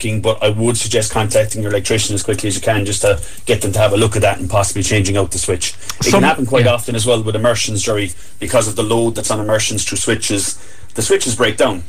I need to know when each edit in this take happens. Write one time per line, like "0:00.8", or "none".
none